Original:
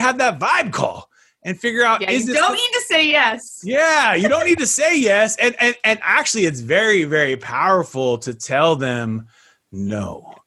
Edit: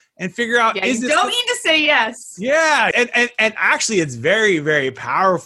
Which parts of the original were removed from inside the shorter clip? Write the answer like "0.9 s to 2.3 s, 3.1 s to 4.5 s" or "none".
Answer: 4.2 s to 5.4 s